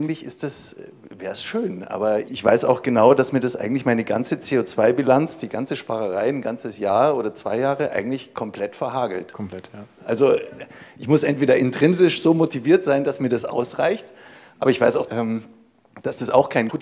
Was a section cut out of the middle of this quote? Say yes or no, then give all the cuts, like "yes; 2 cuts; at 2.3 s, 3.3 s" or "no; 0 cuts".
yes; 2 cuts; at 10.0 s, 15.1 s